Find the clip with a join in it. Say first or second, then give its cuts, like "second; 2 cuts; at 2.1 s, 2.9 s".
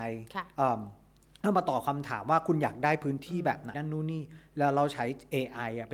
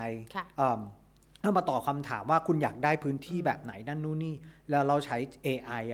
first; 1 cut; at 3.7 s